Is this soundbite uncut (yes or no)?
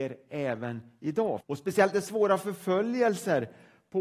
no